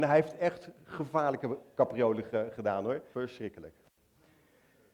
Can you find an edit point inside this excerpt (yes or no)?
yes